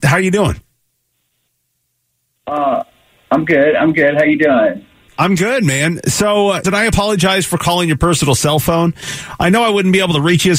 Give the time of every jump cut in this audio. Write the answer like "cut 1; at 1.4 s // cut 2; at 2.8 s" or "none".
cut 1; at 6.6 s